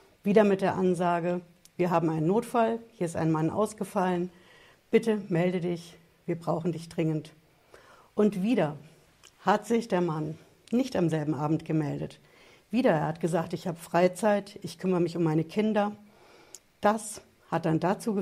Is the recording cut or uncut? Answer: cut